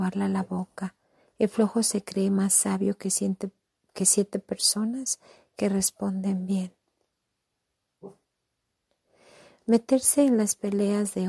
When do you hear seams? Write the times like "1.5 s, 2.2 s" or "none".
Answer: none